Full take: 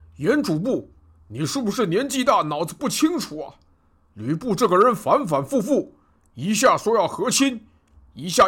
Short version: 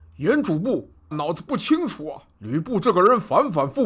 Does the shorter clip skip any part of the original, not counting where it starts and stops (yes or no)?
yes